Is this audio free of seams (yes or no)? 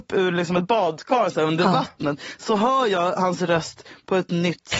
yes